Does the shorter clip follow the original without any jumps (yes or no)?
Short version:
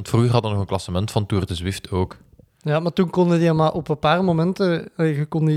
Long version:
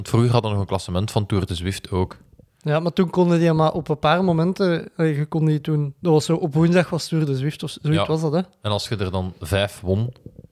yes